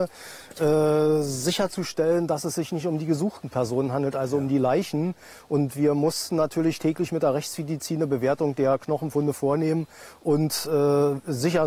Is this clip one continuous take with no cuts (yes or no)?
yes